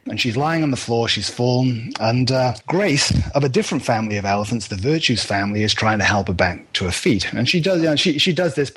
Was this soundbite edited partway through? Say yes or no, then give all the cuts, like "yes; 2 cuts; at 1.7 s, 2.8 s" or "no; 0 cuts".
no; 0 cuts